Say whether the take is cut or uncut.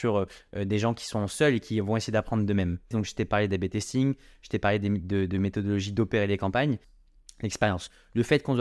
cut